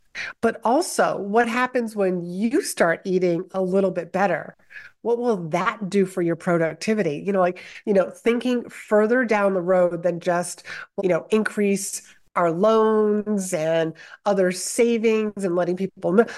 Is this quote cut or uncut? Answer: cut